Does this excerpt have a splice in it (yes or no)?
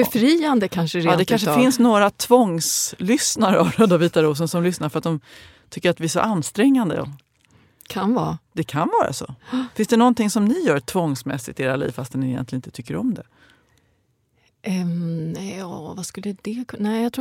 no